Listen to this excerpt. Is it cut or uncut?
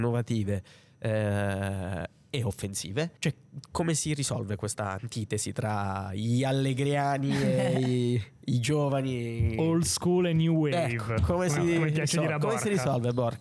cut